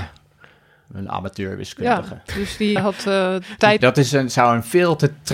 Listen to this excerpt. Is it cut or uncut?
cut